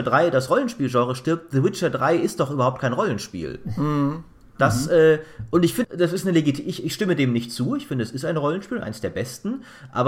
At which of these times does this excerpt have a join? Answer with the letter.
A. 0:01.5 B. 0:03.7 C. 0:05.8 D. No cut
C